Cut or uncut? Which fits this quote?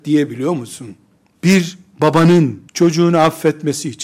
cut